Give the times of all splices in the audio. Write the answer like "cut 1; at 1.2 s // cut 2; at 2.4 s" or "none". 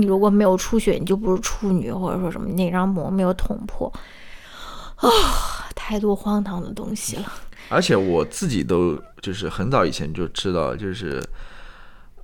none